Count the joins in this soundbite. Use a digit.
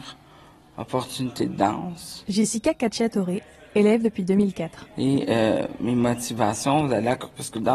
0